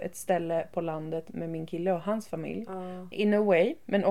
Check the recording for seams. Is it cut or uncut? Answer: cut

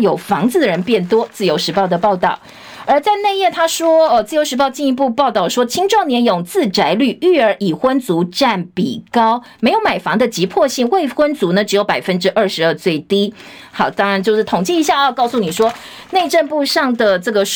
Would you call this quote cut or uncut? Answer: cut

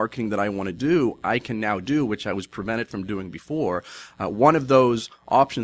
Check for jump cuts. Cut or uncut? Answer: uncut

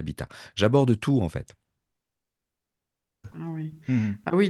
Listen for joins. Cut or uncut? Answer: cut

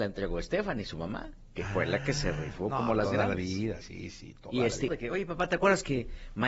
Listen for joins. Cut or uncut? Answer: cut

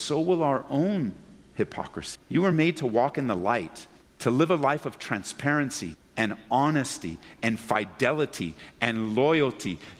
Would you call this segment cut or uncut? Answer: cut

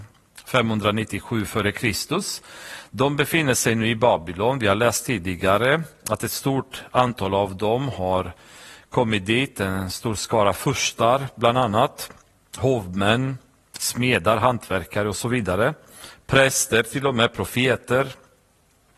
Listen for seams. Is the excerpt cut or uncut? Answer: uncut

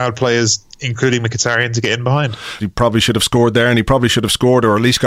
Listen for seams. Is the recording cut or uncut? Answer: cut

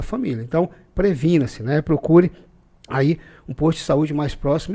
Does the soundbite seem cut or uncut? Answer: uncut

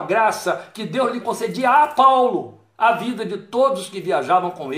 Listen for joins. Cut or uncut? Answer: cut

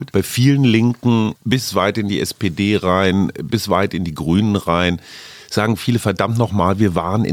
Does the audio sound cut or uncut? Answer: uncut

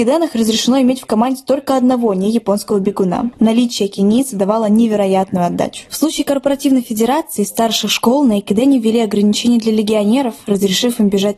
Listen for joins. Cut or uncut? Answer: cut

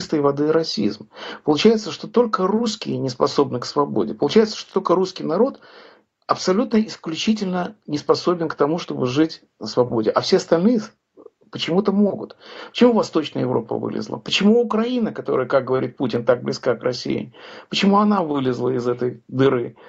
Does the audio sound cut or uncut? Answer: uncut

